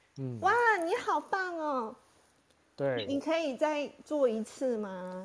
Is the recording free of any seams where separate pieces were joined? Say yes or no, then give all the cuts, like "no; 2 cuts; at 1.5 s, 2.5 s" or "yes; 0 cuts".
yes; 0 cuts